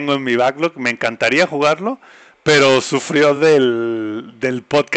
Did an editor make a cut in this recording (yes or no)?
no